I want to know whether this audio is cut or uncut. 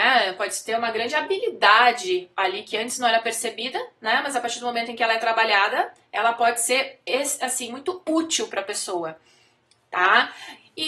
uncut